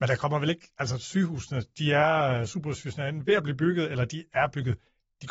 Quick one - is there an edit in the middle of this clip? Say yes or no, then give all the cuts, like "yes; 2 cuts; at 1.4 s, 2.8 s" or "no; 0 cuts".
no; 0 cuts